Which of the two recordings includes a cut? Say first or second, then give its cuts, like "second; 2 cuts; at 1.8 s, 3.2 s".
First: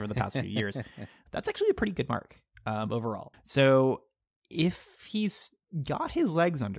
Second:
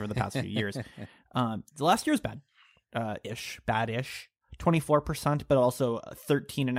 first; 2 cuts; at 1.3 s, 3.3 s